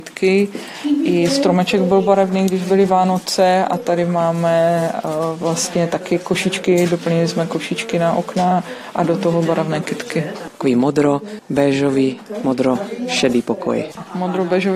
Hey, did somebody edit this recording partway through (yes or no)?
yes